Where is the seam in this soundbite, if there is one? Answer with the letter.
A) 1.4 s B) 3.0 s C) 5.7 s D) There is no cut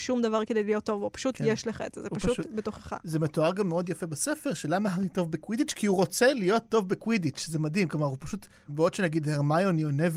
D